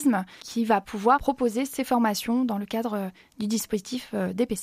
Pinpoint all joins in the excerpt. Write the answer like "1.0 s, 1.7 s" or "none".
none